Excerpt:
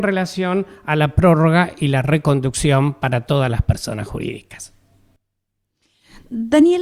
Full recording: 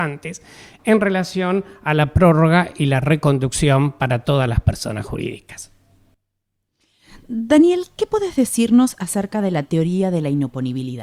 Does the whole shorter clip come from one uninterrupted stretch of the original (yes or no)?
yes